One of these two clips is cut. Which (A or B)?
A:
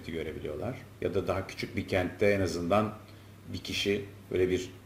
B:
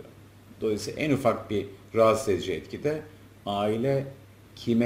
A